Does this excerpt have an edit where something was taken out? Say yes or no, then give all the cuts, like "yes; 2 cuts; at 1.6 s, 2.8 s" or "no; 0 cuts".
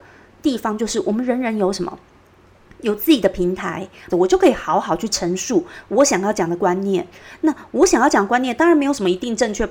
yes; 1 cut; at 4.1 s